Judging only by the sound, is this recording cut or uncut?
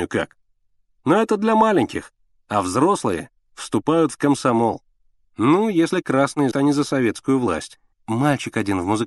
cut